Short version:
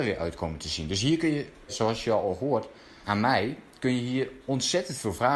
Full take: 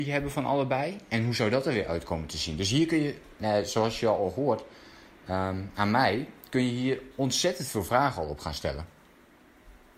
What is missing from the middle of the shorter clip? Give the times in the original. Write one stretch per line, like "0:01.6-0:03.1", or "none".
0:03.4-0:03.6
0:05.0-0:05.7